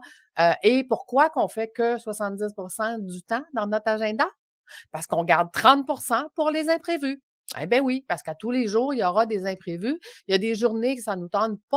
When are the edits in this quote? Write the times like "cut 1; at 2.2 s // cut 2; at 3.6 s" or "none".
cut 1; at 10.2 s